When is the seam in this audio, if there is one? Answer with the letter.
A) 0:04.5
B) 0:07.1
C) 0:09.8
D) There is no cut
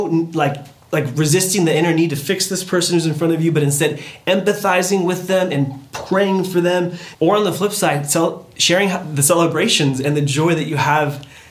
B